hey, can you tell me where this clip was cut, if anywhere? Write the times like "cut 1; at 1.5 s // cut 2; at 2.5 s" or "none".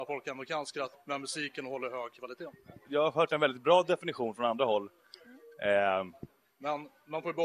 cut 1; at 0.9 s // cut 2; at 2.8 s // cut 3; at 6.4 s